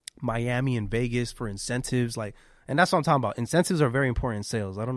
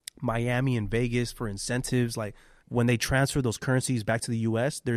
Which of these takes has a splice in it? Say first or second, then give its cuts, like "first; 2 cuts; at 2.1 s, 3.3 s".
second; 1 cut; at 2.6 s